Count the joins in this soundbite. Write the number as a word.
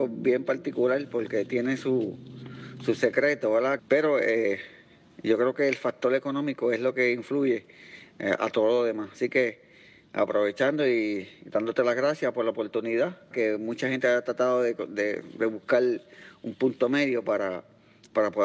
two